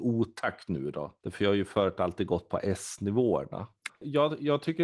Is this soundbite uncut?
no; 1 cut; at 3.9 s

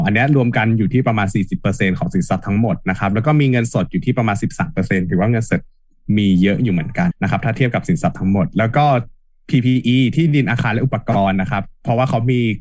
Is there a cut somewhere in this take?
yes; 1 cut; at 7.1 s

